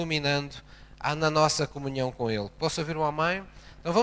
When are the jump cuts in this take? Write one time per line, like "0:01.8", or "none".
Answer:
none